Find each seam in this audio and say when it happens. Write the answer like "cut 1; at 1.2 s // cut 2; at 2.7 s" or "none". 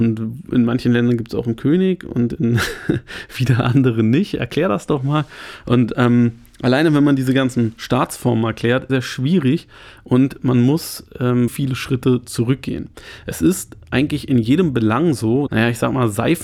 cut 1; at 8.9 s // cut 2; at 11.5 s // cut 3; at 15.5 s